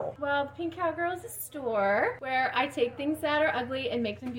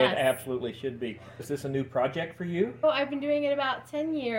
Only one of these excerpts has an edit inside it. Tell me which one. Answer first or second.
second